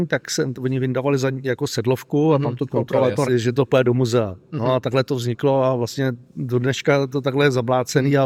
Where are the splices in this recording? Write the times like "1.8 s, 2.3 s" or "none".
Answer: 3.2 s